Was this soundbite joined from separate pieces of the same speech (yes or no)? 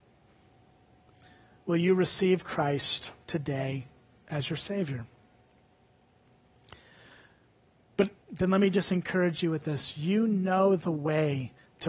yes